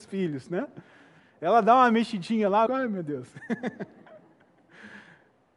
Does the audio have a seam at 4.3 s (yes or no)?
no